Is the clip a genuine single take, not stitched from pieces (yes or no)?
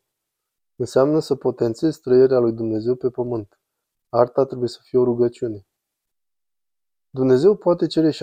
yes